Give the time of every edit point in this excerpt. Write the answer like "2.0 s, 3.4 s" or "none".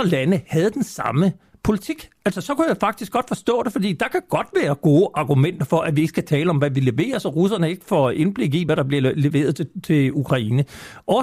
none